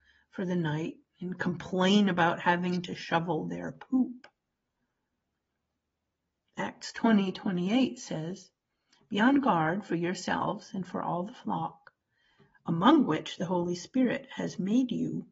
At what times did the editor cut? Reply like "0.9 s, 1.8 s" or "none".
none